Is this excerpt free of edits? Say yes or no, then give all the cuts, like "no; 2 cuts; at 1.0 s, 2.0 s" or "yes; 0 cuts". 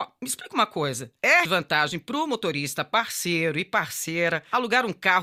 no; 1 cut; at 1.4 s